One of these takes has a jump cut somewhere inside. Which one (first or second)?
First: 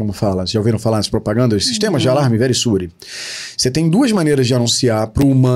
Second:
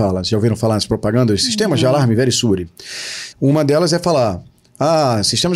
second